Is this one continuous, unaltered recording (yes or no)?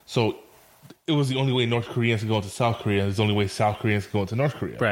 yes